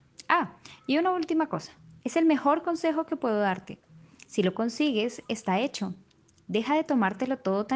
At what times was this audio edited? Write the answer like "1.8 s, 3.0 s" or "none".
2.0 s

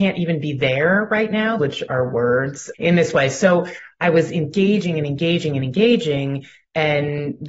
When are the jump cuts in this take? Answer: 1.6 s, 2.7 s

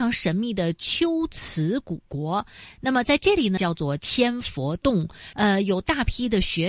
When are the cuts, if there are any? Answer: 3.6 s, 5.3 s

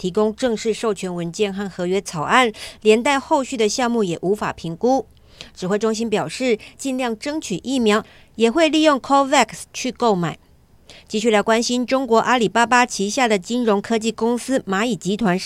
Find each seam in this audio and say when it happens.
6.7 s

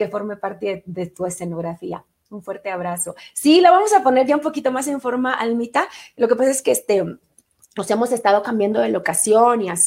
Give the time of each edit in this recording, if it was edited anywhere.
none

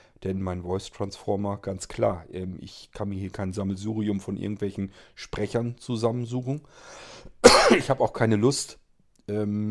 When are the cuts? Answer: none

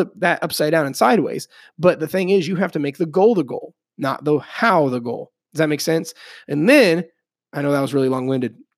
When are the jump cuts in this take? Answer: none

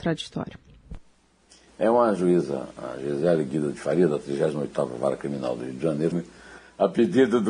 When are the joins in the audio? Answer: 6.1 s

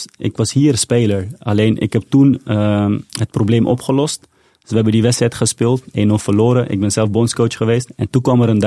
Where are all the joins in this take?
none

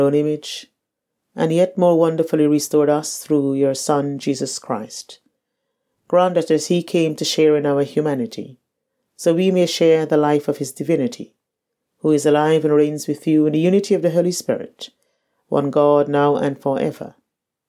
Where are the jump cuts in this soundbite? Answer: none

